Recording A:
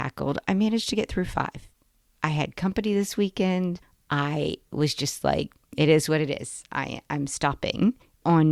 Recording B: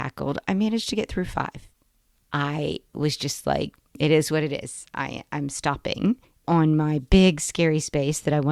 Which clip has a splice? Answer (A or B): B